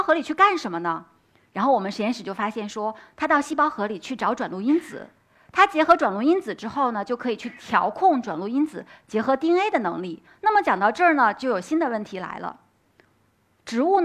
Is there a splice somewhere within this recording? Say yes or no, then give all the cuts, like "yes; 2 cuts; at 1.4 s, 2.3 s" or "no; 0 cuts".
yes; 1 cut; at 10.3 s